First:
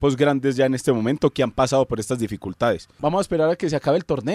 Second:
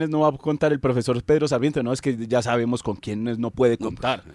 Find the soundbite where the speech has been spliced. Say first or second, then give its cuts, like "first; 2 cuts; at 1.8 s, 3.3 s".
first; 1 cut; at 3.0 s